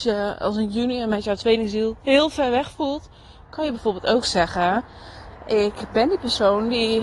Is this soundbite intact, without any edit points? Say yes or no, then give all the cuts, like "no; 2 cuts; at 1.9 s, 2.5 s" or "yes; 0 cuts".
yes; 0 cuts